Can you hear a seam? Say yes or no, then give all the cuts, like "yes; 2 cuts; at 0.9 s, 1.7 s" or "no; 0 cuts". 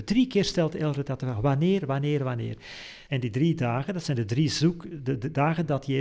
yes; 1 cut; at 3.1 s